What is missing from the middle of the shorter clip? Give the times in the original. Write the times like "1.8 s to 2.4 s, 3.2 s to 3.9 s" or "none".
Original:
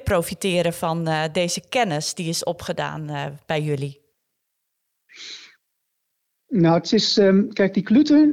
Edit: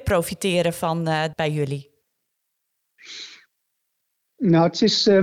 1.3 s to 3.4 s